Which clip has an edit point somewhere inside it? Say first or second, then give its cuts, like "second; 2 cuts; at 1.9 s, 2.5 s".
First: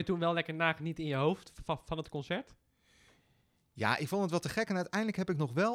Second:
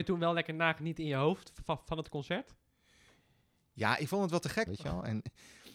second; 1 cut; at 4.7 s